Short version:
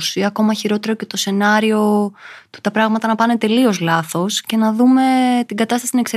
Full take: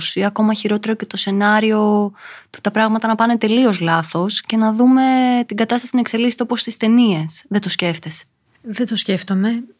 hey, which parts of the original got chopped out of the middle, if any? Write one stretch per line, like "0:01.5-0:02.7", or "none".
none